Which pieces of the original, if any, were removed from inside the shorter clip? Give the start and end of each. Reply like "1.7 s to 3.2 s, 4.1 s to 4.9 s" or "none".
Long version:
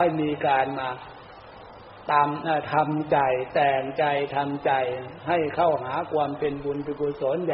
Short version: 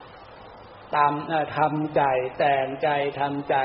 none